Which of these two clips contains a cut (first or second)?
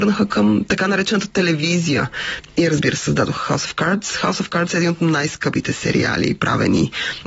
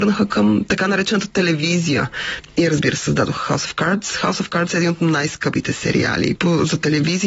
second